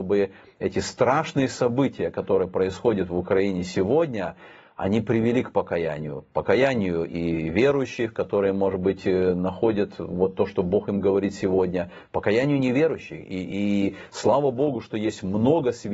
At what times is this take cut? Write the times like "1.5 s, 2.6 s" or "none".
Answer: none

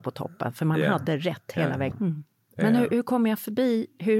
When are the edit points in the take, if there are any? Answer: 1.9 s

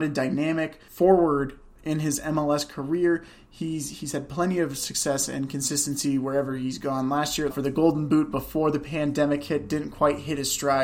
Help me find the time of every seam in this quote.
7.5 s

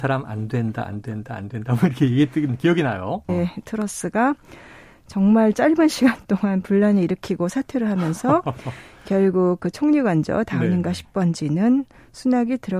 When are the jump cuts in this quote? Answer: 3.3 s

